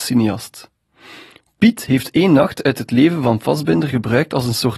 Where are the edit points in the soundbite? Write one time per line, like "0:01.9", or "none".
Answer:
none

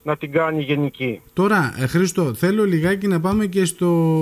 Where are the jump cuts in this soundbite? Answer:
0:01.3

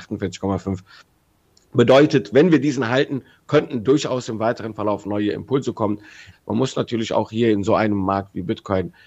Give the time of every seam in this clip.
0:06.3

